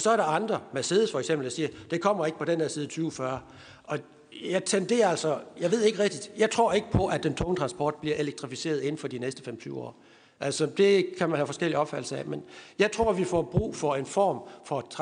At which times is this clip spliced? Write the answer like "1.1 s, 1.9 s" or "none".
none